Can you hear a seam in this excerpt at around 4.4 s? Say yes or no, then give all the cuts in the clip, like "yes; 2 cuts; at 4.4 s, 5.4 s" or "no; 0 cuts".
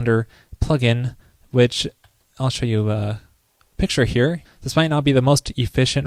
yes; 1 cut; at 4.4 s